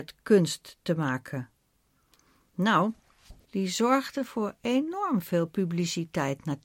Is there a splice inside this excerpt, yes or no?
yes